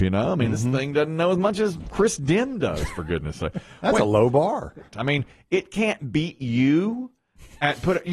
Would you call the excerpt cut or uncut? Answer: cut